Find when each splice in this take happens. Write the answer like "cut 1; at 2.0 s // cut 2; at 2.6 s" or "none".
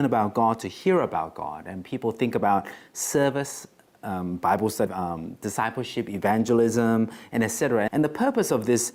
cut 1; at 4.9 s // cut 2; at 7.9 s